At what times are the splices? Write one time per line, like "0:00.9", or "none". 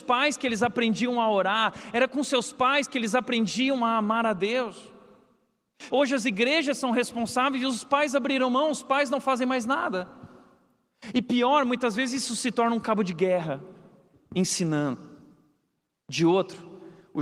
0:05.9
0:14.1